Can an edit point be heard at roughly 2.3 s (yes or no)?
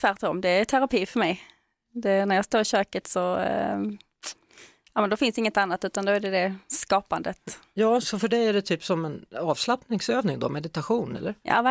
no